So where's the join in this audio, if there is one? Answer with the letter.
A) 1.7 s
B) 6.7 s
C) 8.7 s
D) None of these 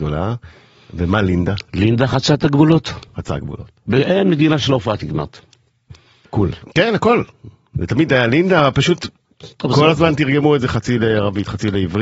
B